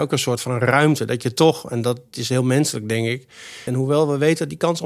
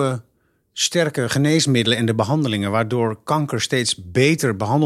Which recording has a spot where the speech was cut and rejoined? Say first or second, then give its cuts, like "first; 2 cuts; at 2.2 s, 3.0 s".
first; 1 cut; at 3.7 s